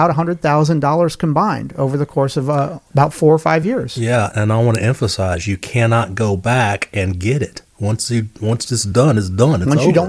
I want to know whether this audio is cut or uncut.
cut